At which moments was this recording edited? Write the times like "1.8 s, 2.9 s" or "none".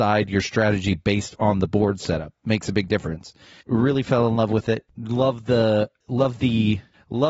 3.6 s